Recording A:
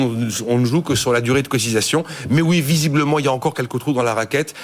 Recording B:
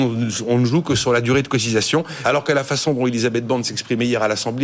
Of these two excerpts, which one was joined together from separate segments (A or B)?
B